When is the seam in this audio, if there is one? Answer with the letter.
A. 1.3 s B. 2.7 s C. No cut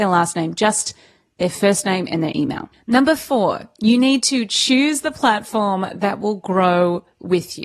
B